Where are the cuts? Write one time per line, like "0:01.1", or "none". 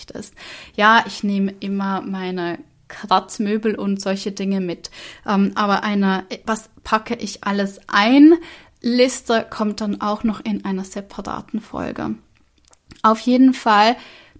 none